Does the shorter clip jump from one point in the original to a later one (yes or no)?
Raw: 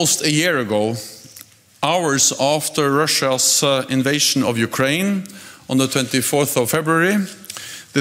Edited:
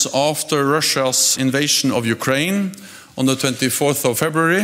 yes